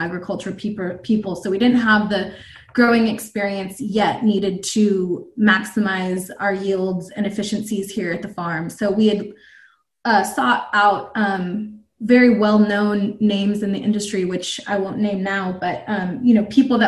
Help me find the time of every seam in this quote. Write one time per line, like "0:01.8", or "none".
none